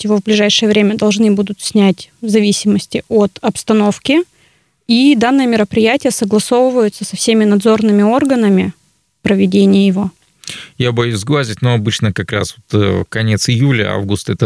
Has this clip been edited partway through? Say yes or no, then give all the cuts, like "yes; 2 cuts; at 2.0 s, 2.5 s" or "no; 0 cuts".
no; 0 cuts